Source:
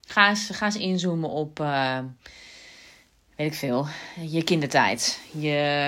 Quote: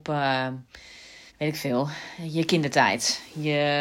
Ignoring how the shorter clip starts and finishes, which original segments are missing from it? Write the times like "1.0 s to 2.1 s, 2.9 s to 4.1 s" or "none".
2.8 s to 3.3 s